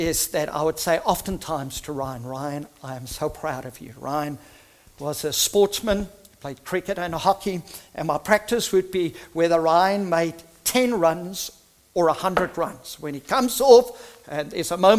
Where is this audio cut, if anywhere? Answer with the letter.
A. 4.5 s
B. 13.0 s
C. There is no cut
C